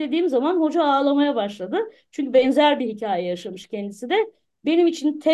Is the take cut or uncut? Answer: uncut